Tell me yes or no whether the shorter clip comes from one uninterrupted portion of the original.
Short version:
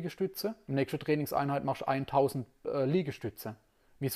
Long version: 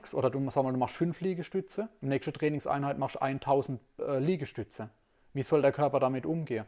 yes